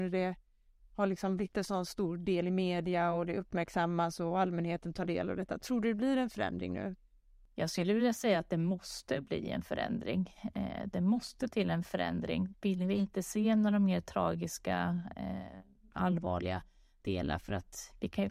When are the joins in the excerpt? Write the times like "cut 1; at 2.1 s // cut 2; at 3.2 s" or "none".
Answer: cut 1; at 12.5 s

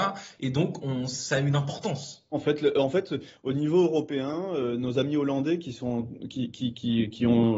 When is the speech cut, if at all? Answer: cut 1; at 2.3 s

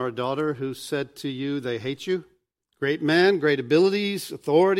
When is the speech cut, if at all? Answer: cut 1; at 2.6 s

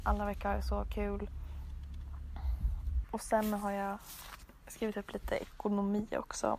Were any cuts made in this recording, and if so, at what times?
cut 1; at 3.0 s

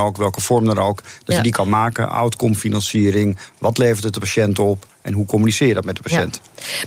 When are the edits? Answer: none

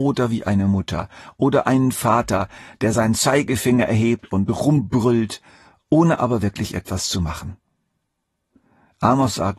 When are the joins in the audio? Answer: none

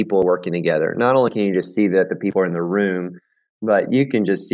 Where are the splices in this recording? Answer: none

